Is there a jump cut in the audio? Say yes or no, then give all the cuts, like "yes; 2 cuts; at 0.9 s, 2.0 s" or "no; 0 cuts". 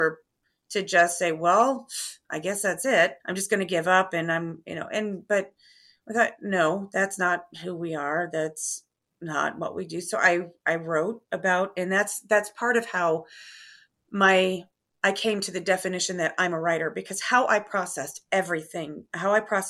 yes; 1 cut; at 3.2 s